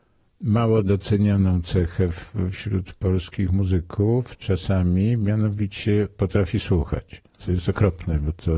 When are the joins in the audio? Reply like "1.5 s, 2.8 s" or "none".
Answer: 7.4 s